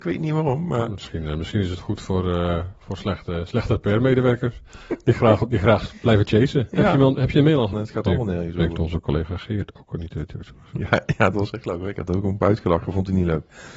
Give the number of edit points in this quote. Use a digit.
1